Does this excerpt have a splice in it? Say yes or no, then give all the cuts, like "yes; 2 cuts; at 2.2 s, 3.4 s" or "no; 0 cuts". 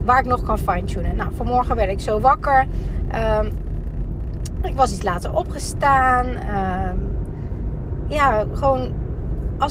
no; 0 cuts